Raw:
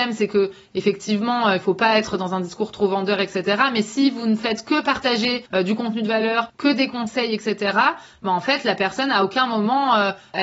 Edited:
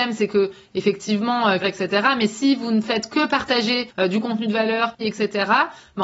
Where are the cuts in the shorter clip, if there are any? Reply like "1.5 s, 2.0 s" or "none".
1.6 s, 5.0 s